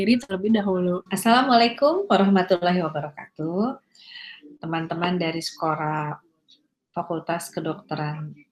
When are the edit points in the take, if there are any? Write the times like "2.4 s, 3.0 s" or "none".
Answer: 1.1 s